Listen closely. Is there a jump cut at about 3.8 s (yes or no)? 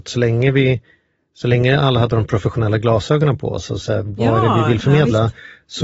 yes